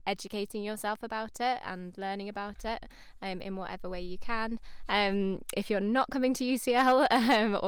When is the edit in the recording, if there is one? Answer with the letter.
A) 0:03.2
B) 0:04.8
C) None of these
B